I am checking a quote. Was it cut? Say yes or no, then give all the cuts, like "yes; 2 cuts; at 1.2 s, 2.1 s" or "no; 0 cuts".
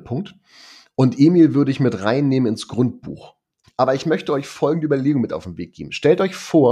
yes; 1 cut; at 3.6 s